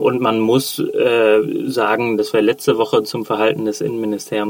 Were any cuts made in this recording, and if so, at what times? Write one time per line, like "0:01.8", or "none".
0:02.2